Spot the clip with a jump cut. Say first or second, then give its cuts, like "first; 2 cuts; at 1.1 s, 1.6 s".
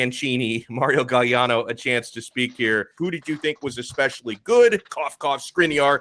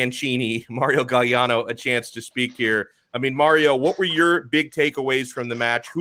first; 1 cut; at 3.0 s